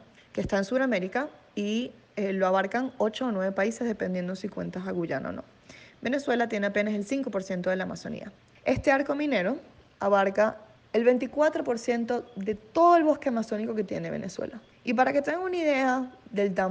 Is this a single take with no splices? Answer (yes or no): yes